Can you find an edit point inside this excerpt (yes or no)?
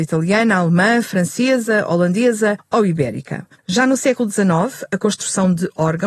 yes